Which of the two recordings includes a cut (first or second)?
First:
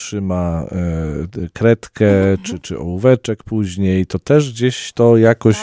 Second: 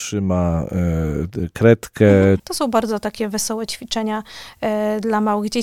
second